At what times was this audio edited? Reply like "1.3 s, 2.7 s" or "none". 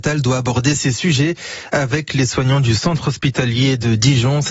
none